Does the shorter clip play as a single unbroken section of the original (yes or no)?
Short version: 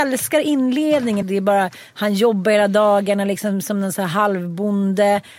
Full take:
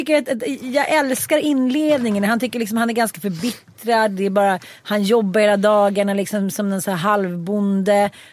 no